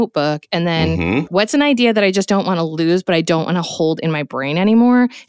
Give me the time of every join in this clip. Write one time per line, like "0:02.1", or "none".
0:01.3